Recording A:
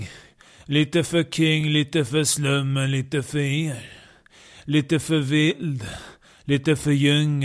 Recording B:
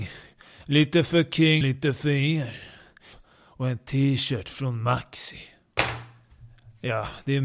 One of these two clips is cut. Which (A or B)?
B